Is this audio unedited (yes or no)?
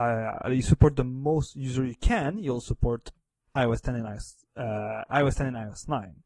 yes